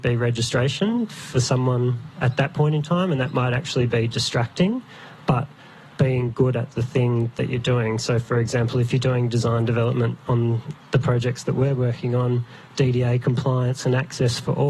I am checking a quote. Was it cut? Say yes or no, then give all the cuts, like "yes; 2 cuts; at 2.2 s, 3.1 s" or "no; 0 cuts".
no; 0 cuts